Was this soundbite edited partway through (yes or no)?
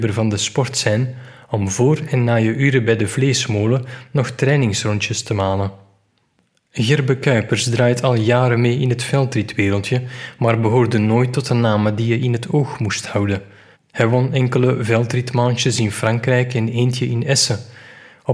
yes